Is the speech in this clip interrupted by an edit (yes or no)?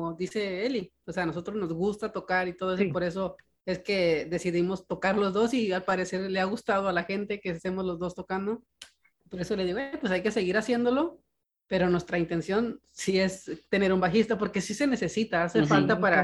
no